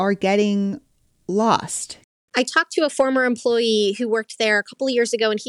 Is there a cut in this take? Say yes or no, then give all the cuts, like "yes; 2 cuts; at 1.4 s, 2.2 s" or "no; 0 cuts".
no; 0 cuts